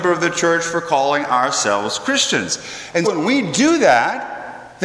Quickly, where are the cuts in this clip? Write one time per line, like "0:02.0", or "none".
0:03.0